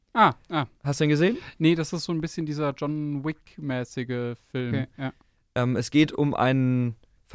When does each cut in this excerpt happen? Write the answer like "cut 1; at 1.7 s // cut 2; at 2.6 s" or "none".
cut 1; at 4.7 s

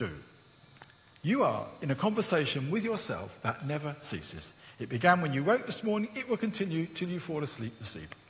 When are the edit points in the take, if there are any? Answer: none

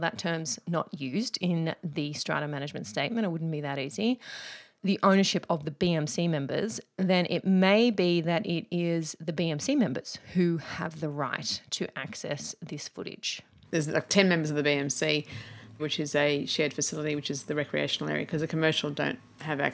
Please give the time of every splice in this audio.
cut 1; at 13.6 s // cut 2; at 15.8 s

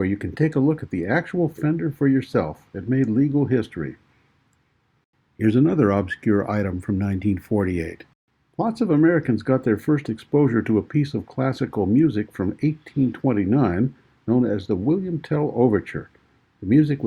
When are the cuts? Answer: none

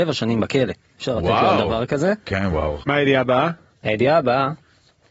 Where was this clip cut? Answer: cut 1; at 2.8 s

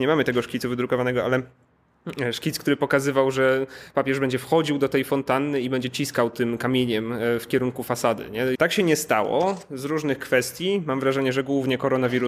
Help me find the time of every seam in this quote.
cut 1; at 8.5 s

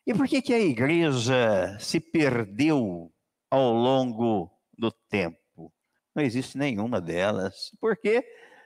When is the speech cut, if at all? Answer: cut 1; at 6.0 s

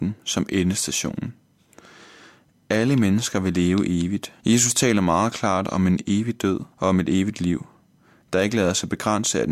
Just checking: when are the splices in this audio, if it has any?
cut 1; at 4.4 s // cut 2; at 6.7 s

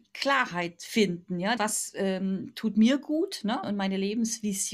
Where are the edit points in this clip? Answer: cut 1; at 1.6 s // cut 2; at 3.6 s

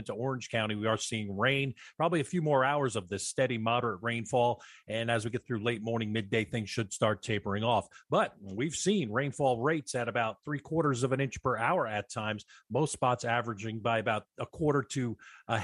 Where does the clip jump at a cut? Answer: none

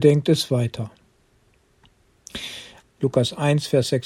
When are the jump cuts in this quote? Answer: cut 1; at 2.8 s

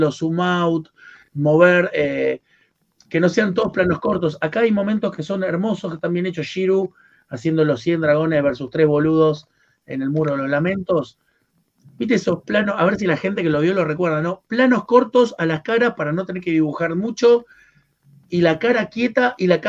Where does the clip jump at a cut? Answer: none

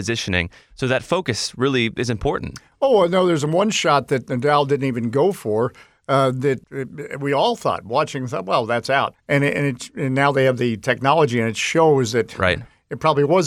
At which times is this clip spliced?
cut 1; at 9.1 s

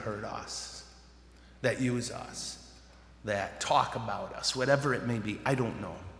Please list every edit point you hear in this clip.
none

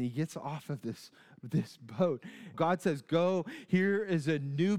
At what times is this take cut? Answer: cut 1; at 2.5 s

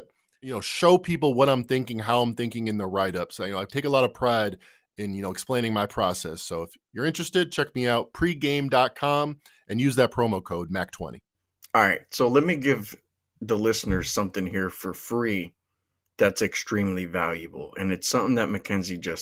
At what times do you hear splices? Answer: none

